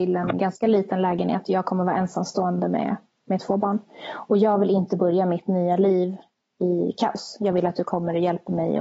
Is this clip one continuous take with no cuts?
yes; 0 cuts

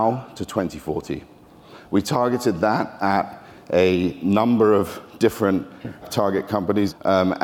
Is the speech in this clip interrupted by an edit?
yes; 1 cut; at 6.0 s

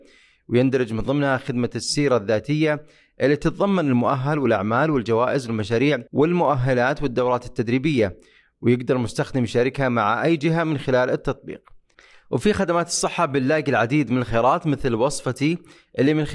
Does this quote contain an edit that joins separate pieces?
yes; 1 cut; at 6.1 s

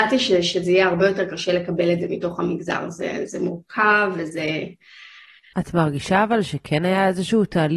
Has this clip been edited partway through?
yes; 1 cut; at 5.5 s

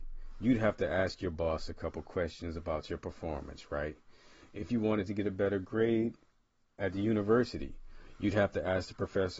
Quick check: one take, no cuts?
yes; 0 cuts

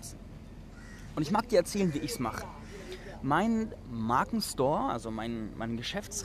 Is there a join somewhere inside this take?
no; 0 cuts

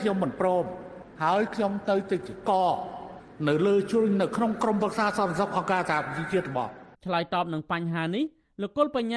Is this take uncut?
no; 1 cut; at 6.9 s

